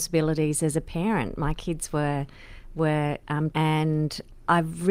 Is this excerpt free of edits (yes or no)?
no